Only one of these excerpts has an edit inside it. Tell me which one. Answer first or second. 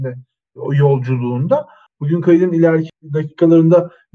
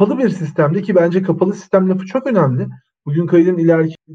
first